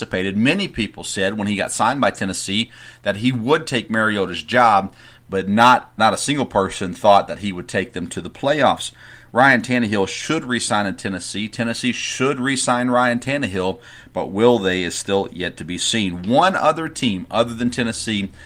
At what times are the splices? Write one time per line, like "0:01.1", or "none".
0:06.0